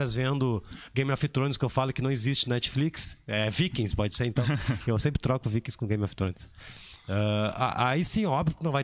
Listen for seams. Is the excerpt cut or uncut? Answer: uncut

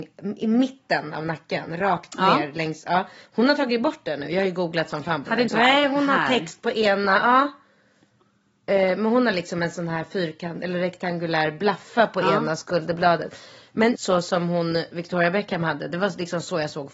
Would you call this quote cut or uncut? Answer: cut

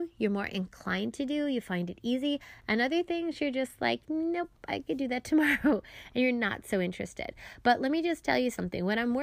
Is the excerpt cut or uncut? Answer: uncut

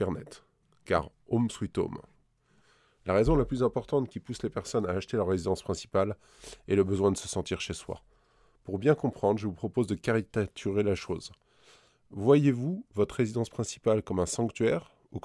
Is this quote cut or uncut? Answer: uncut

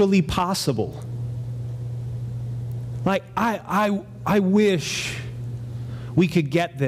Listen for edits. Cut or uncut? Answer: uncut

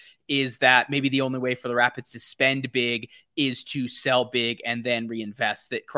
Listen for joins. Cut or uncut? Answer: uncut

